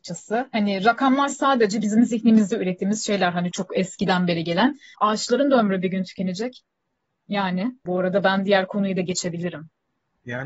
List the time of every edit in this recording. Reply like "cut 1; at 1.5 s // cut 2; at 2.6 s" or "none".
cut 1; at 3.5 s // cut 2; at 4.9 s // cut 3; at 7.9 s